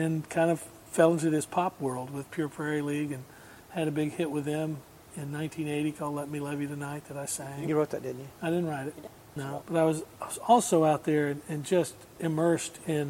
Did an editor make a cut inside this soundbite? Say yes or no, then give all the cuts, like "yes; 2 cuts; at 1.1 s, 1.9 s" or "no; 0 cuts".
yes; 1 cut; at 9.6 s